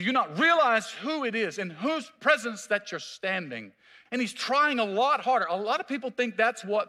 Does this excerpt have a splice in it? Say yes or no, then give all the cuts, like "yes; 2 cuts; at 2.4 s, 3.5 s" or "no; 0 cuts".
yes; 1 cut; at 4.1 s